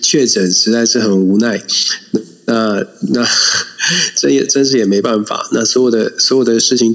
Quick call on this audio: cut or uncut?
uncut